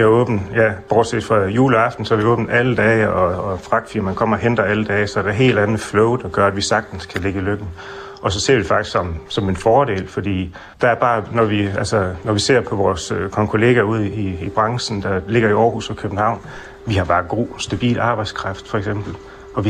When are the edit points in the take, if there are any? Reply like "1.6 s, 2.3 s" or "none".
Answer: 10.7 s